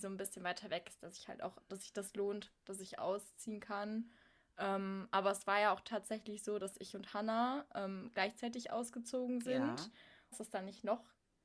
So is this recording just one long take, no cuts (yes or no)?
no